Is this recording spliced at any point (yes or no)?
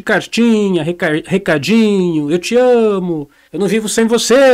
yes